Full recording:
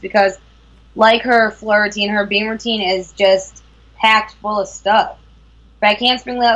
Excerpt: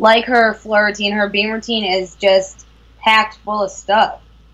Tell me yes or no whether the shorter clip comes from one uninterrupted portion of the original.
yes